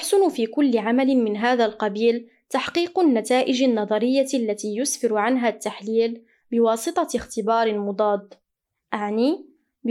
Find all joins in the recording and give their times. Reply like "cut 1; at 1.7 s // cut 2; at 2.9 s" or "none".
none